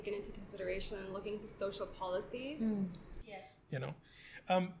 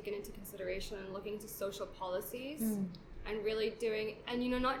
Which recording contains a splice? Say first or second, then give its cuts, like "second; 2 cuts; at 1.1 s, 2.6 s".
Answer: first; 1 cut; at 3.2 s